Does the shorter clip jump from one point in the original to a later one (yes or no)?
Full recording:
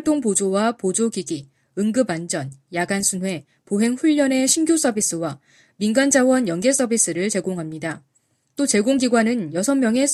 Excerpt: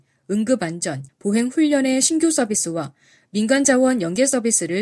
yes